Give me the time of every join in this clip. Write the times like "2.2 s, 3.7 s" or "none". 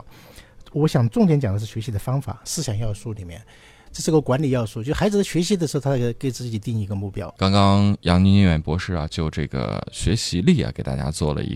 3.9 s, 7.4 s